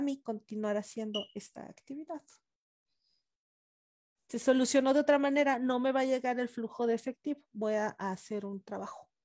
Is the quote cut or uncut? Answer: uncut